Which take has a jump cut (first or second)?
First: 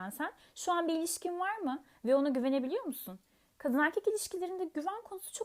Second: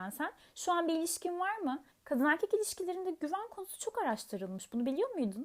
second